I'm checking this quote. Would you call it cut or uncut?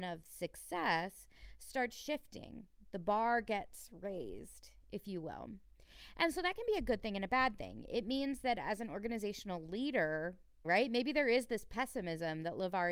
cut